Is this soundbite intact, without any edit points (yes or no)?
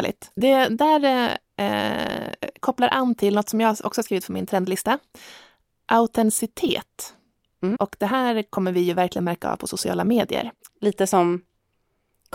no